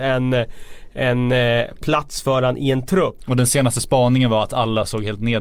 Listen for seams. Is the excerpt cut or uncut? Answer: cut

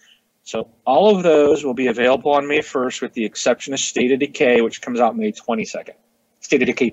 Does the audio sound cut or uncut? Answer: uncut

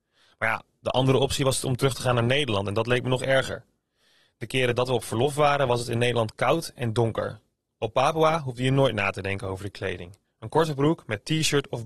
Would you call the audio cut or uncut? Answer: uncut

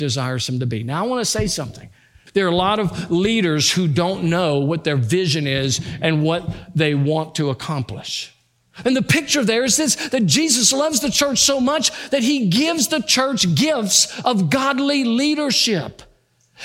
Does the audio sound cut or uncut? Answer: cut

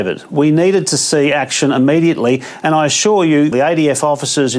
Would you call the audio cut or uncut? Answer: cut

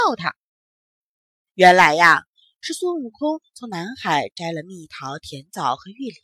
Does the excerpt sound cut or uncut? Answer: uncut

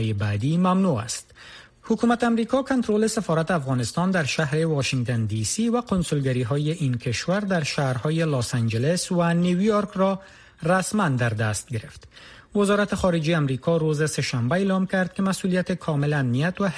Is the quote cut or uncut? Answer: cut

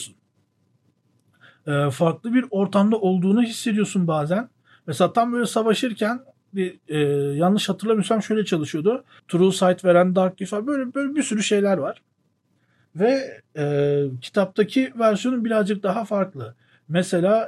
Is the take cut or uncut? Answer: cut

